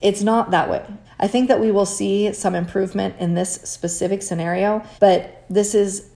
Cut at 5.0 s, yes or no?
yes